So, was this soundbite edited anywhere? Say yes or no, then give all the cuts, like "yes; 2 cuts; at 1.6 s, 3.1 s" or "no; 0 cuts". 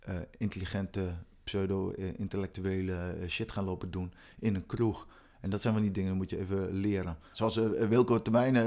yes; 1 cut; at 7.3 s